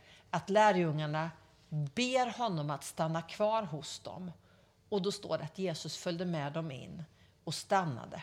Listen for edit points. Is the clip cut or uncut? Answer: uncut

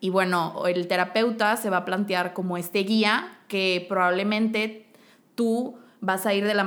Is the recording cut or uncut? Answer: uncut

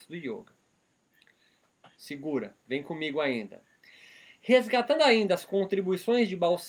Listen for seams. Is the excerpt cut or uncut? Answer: uncut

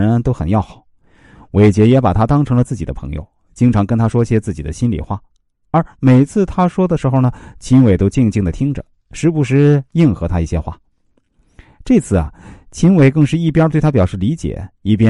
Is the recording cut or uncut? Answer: uncut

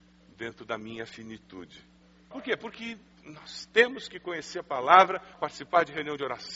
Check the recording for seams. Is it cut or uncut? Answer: cut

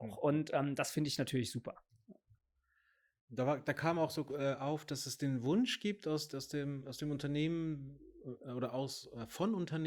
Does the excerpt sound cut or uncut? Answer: uncut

